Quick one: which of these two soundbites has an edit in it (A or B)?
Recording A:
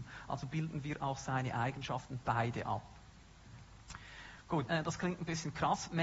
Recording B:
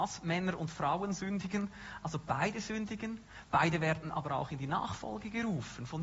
A